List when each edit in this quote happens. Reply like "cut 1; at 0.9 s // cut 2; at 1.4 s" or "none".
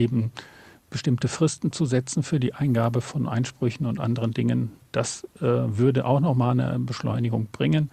none